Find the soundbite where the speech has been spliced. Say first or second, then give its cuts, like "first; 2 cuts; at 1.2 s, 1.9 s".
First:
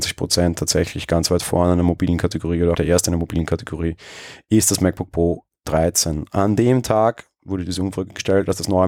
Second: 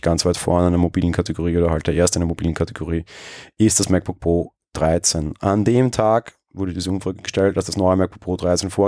first; 1 cut; at 2.7 s